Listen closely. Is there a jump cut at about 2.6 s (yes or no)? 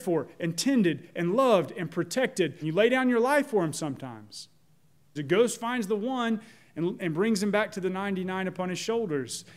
yes